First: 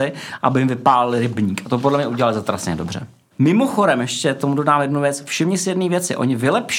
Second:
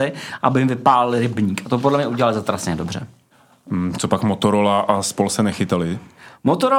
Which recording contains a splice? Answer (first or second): first